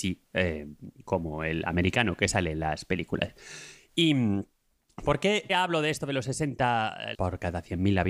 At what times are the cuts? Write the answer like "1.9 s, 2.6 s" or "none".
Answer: 5.5 s, 7.1 s